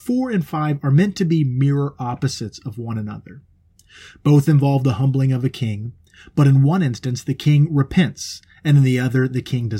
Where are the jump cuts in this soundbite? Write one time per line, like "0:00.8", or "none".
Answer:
none